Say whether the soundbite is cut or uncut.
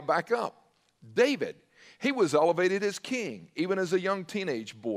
uncut